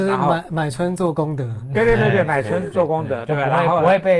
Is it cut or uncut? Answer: uncut